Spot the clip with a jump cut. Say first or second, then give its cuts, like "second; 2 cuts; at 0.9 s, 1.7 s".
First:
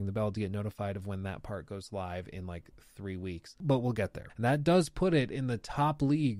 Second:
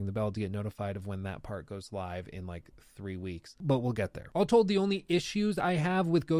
first; 1 cut; at 4.3 s